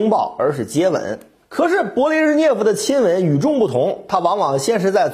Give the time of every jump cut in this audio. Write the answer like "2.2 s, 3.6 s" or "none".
1.4 s